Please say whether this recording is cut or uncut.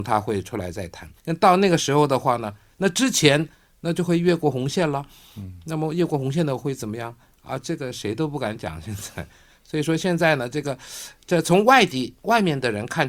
cut